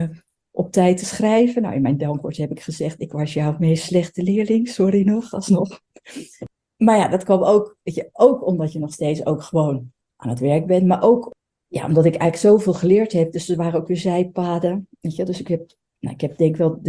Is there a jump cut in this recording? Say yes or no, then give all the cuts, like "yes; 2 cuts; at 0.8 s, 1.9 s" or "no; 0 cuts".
no; 0 cuts